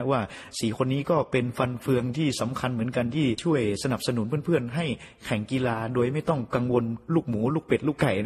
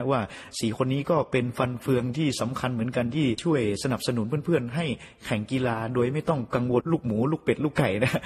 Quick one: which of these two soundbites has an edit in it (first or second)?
second